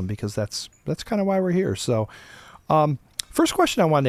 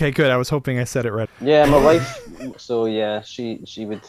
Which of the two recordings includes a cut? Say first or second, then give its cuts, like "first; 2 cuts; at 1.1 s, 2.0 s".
second; 2 cuts; at 1.3 s, 2.5 s